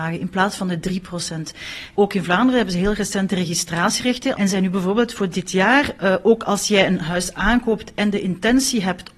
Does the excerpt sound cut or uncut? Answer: cut